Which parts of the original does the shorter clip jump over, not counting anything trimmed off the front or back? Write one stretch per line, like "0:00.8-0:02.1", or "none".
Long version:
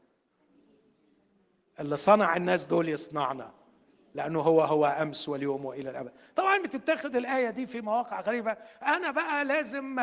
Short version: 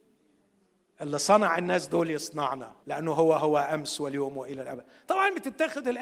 0:03.6-0:04.1